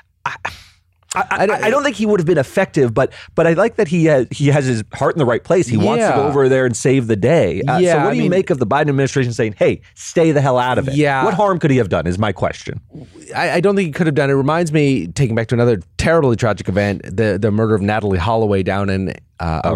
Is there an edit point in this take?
no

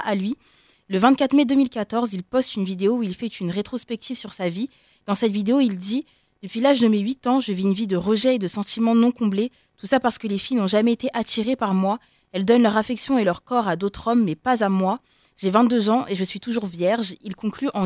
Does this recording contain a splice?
no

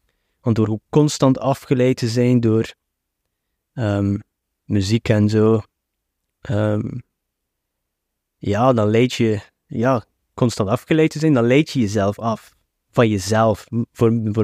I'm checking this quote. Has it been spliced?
no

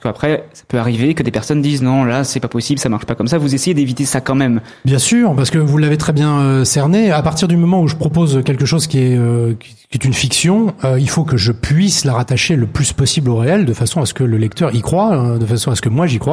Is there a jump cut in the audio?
no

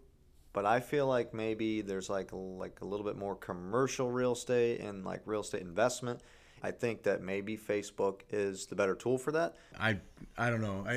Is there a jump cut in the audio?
yes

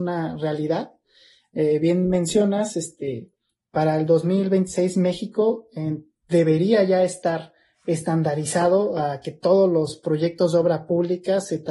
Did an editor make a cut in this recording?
no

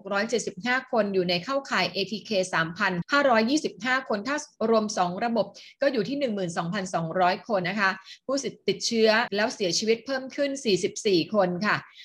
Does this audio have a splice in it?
yes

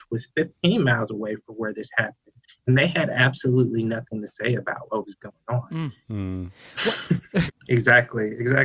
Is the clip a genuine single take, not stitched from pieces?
no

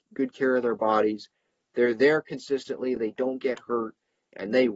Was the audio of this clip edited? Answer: no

